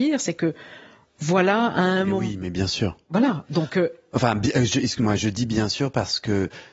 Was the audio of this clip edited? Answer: no; 0 cuts

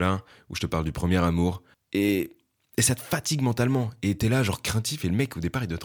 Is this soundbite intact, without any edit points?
no; 1 cut; at 1.7 s

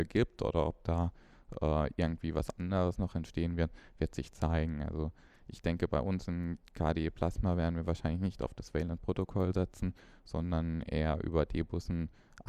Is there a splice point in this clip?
no; 0 cuts

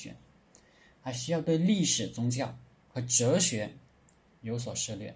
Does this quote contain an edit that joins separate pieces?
no; 0 cuts

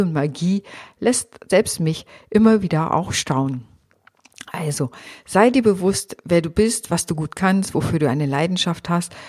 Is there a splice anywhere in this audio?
no; 0 cuts

